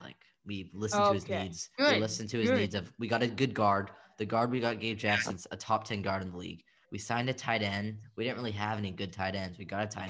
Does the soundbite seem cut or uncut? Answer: cut